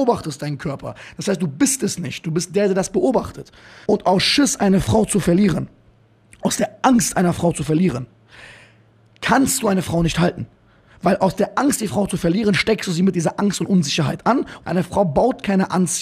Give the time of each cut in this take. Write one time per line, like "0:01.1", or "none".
0:03.9
0:14.6